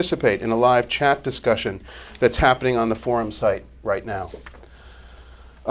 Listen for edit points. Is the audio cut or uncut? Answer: uncut